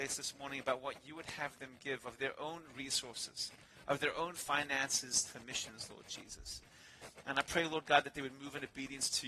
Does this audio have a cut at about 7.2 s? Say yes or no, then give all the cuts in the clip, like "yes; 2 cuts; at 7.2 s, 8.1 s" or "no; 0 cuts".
no; 0 cuts